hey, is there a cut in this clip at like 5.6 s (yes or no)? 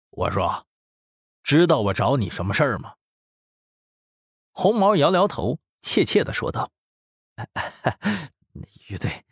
no